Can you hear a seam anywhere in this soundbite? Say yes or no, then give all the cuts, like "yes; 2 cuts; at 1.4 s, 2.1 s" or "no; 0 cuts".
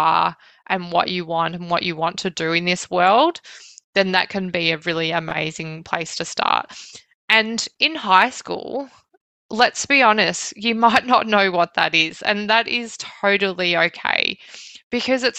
no; 0 cuts